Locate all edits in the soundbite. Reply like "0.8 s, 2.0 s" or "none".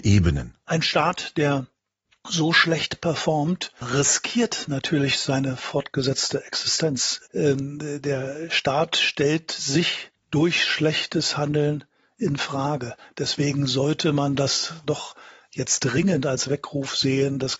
7.3 s